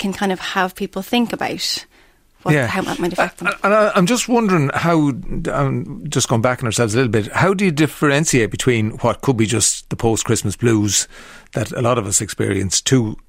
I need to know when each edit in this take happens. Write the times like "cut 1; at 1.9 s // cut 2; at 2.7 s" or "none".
none